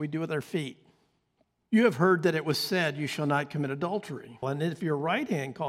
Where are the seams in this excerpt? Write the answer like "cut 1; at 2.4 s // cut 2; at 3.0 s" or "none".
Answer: cut 1; at 1.6 s // cut 2; at 4.4 s